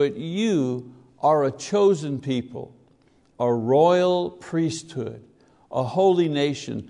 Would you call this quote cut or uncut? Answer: uncut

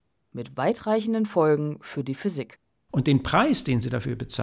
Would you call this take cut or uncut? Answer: uncut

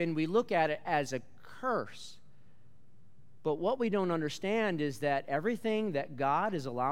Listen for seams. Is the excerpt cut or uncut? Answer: uncut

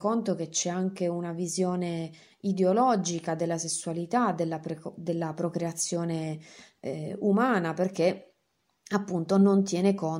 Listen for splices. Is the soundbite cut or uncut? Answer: uncut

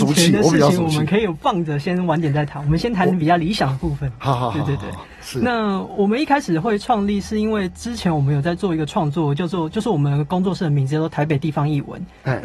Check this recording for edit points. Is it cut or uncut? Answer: uncut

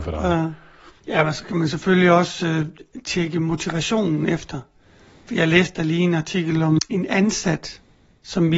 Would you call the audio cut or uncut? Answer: uncut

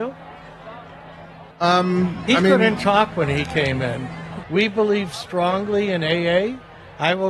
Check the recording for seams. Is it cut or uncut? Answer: cut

